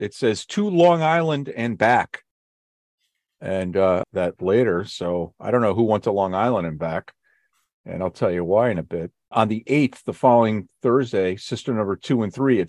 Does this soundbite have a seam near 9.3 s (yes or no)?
yes